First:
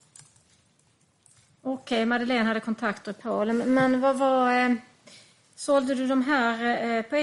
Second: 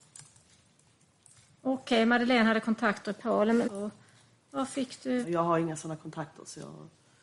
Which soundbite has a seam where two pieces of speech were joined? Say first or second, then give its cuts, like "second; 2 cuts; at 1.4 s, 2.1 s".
second; 2 cuts; at 3.7 s, 5.2 s